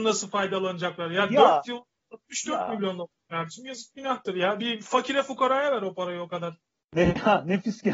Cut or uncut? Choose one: cut